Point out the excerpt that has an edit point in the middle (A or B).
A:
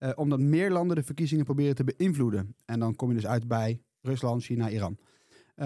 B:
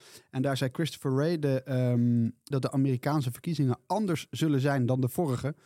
B